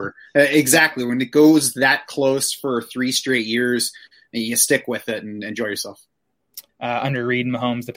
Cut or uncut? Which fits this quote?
cut